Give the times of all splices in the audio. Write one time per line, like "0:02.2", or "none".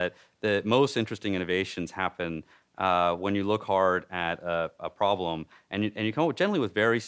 none